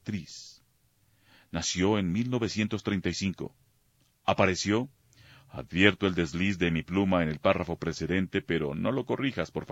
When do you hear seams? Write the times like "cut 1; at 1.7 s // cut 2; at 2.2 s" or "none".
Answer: none